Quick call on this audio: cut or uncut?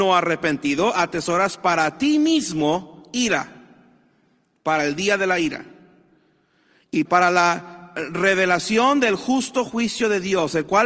cut